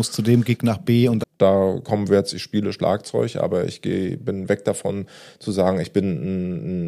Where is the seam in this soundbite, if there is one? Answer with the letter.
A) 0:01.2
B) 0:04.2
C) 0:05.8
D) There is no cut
A